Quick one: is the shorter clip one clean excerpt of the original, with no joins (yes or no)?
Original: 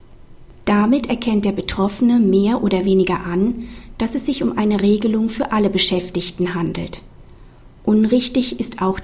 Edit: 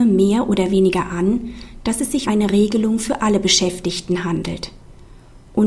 no